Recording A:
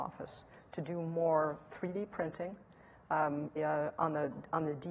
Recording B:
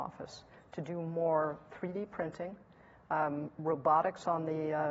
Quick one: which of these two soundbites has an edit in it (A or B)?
A